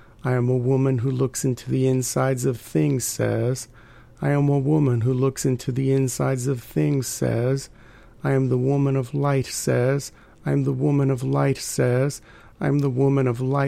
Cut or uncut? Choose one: uncut